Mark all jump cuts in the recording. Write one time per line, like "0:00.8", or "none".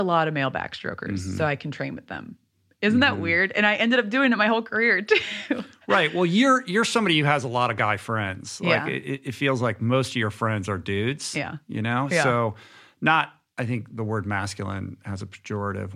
none